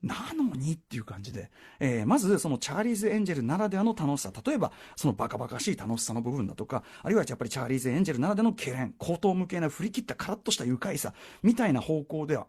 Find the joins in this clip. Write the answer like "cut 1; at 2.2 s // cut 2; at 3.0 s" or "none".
cut 1; at 4.9 s